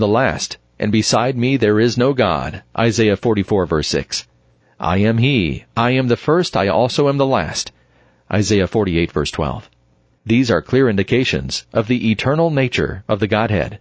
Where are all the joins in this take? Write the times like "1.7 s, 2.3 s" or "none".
none